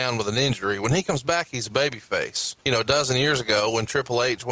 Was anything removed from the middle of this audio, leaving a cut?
yes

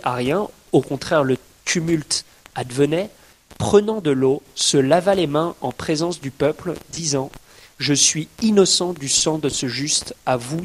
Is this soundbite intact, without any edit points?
yes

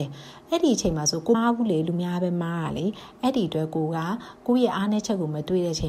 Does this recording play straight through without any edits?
no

